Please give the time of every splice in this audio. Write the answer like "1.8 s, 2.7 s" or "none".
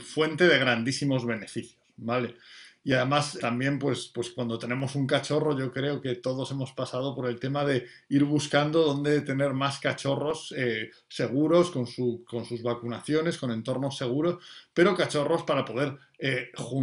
3.4 s